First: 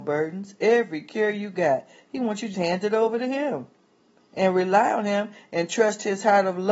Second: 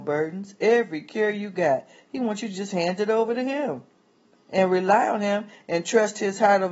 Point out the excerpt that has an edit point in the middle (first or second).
first